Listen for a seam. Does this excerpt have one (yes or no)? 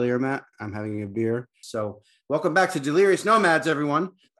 yes